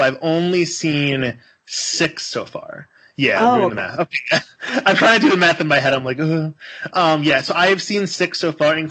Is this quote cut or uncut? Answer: uncut